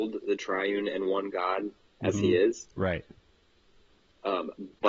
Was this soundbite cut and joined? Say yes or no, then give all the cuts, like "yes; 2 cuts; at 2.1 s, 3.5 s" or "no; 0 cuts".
no; 0 cuts